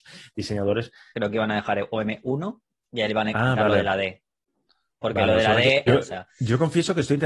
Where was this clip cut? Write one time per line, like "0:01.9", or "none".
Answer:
0:01.1
0:05.9